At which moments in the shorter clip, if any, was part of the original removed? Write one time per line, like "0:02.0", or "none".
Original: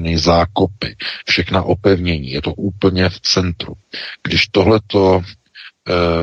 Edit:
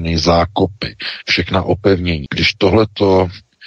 0:02.3